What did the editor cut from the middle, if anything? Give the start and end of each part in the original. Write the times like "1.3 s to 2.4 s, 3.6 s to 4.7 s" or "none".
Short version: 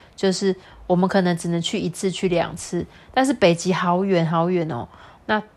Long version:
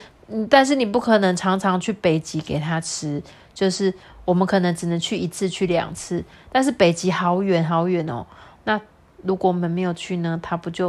none